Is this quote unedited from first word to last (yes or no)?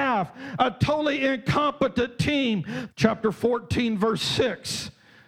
no